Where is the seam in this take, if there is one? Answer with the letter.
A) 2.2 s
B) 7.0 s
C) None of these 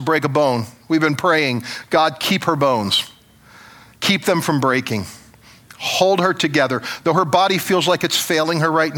C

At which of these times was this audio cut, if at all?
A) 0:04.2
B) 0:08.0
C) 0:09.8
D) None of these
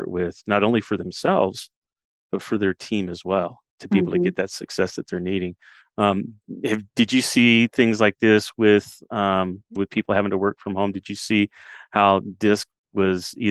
C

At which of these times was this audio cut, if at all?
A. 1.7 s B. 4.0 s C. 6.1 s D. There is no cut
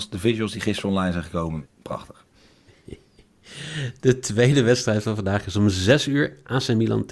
A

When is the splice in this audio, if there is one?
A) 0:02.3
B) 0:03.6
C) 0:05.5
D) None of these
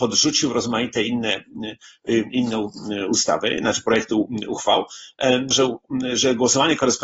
C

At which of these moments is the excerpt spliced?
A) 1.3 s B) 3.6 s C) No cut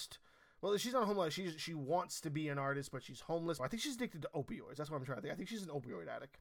B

